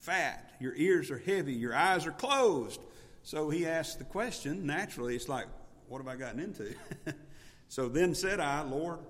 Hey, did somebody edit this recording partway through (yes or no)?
no